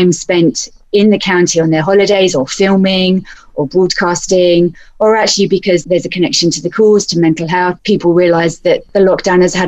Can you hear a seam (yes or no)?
no